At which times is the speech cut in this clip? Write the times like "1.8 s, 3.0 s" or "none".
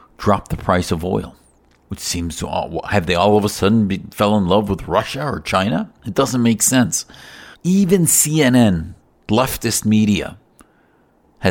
1.9 s, 6.0 s, 7.5 s